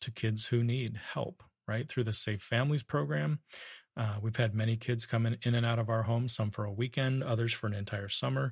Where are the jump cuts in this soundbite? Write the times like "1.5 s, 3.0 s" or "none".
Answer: none

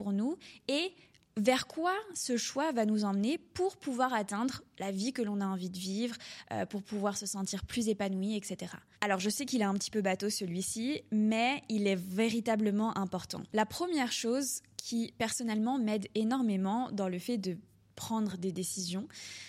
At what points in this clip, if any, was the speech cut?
8.9 s, 13.5 s

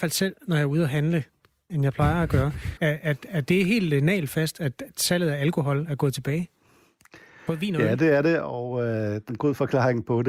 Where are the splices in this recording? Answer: 1.7 s, 2.8 s, 9.3 s

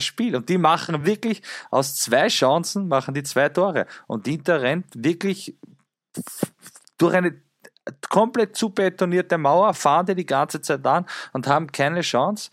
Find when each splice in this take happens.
none

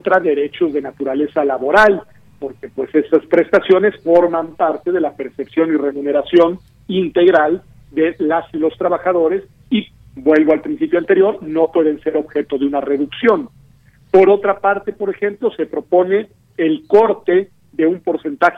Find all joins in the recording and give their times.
none

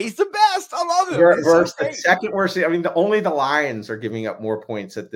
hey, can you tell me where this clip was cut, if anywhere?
none

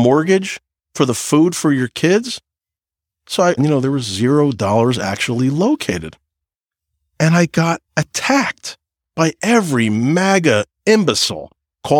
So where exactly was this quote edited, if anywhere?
3.6 s, 7.9 s

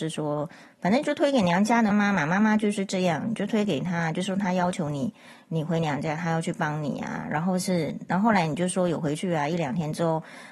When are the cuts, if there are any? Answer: 1.9 s

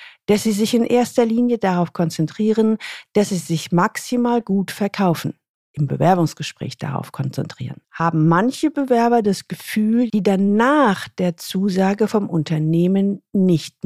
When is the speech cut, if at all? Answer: 5.5 s, 7.8 s, 10.1 s

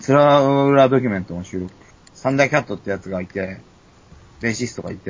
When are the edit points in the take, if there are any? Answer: 2.0 s

